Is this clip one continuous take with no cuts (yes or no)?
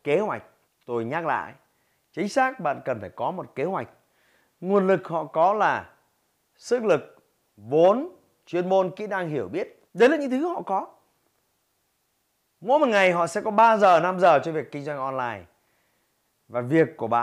no